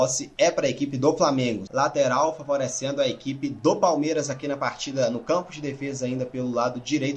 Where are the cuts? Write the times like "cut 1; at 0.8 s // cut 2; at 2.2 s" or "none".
cut 1; at 1.7 s